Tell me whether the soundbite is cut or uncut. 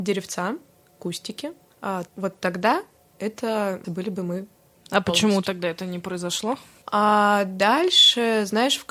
cut